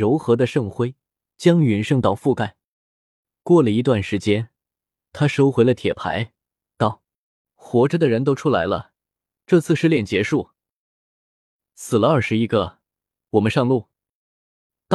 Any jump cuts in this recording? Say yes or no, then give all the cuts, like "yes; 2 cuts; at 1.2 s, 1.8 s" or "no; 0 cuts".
no; 0 cuts